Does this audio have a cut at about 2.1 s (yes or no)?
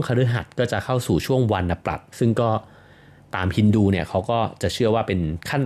yes